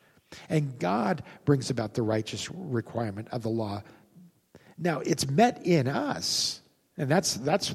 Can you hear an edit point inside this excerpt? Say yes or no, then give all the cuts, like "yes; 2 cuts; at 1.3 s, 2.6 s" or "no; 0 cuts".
no; 0 cuts